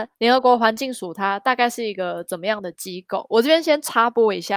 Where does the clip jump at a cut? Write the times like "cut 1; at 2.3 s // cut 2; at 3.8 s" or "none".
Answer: none